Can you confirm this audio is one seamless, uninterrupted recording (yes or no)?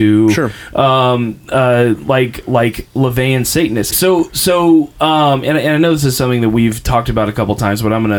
no